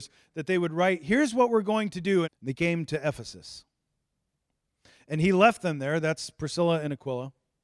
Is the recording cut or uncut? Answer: cut